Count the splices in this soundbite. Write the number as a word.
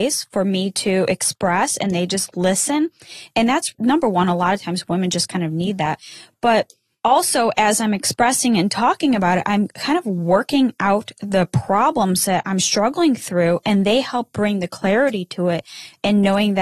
zero